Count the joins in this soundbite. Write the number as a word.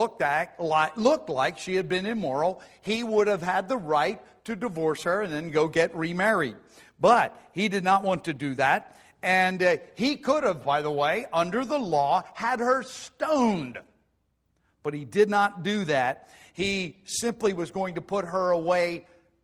zero